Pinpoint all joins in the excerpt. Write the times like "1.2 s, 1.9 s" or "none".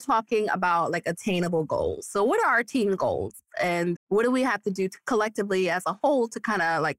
3.9 s